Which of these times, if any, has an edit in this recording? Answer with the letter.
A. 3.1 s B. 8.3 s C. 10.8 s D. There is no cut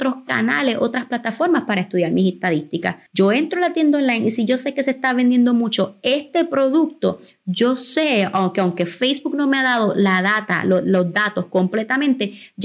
A